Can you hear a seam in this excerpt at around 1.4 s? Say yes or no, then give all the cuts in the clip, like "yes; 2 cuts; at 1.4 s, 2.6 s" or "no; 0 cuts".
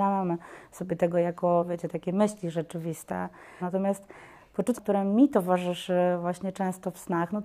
no; 2 cuts; at 3.6 s, 4.7 s